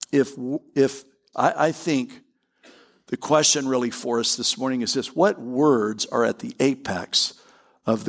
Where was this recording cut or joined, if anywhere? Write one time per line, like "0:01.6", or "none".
0:01.3